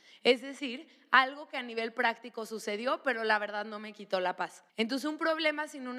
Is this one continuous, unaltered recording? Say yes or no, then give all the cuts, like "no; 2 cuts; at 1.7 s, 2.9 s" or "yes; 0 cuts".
no; 1 cut; at 4.7 s